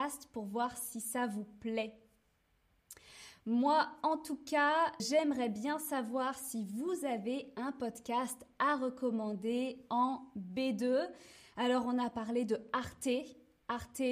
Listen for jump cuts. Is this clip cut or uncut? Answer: cut